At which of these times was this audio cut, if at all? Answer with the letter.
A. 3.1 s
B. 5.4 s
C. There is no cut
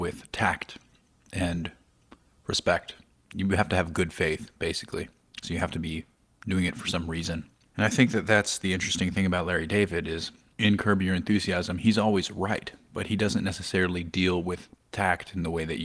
B